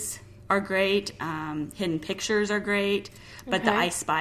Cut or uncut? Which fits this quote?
uncut